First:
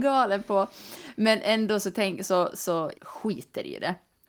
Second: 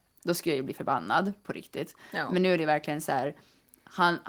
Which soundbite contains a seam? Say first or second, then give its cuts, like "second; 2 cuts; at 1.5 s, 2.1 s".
first; 1 cut; at 2.9 s